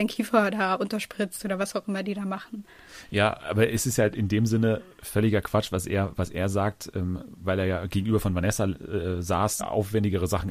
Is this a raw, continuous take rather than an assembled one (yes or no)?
no